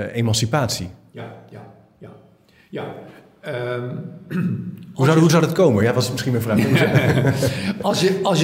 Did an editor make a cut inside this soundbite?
no; 0 cuts

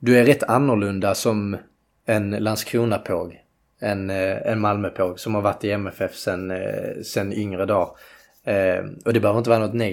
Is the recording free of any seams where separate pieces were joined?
yes; 0 cuts

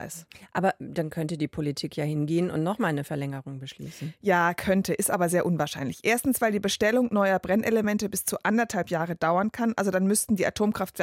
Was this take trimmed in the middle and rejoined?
no; 0 cuts

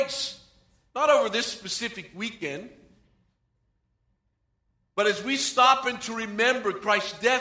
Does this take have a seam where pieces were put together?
no; 0 cuts

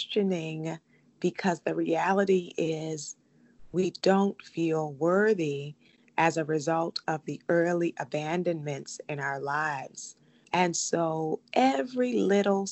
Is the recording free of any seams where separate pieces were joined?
no; 1 cut; at 10.4 s

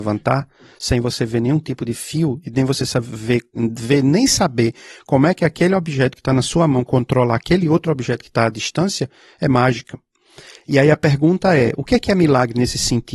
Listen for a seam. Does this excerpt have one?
no; 0 cuts

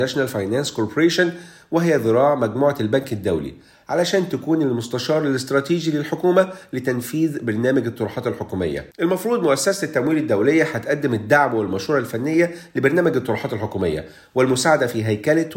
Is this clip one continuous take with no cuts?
no; 1 cut; at 8.9 s

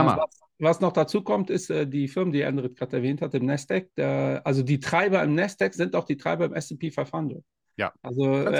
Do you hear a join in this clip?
no; 0 cuts

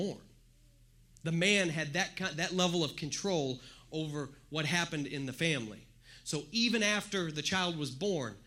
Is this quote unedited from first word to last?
yes; 0 cuts

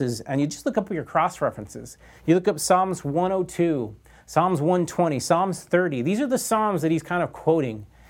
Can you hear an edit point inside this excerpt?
no; 0 cuts

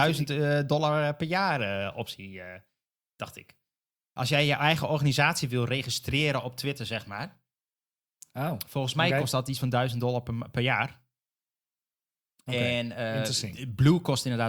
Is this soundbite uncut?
yes; 0 cuts

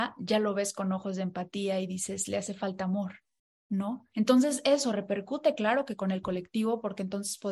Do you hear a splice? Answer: yes; 1 cut; at 4.1 s

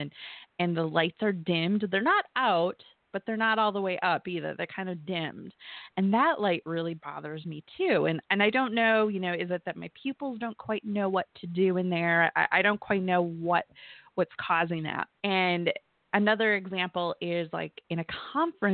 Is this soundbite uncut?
no; 1 cut; at 15.2 s

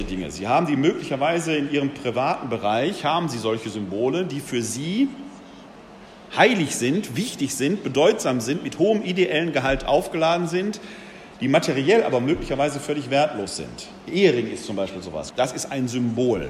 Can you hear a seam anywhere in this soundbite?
yes; 1 cut; at 15.3 s

